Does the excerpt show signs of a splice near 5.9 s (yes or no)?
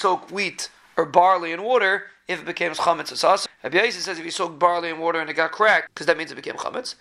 yes